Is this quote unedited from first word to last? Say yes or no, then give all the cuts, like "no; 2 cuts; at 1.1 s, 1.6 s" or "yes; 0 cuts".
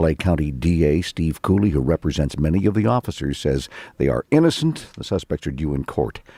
yes; 0 cuts